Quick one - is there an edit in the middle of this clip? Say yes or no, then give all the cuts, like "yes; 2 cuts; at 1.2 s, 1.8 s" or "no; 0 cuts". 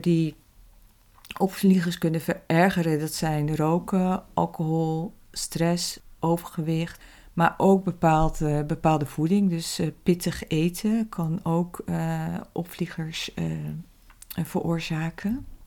no; 0 cuts